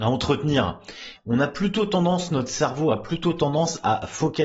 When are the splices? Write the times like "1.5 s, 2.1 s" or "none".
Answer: 1.1 s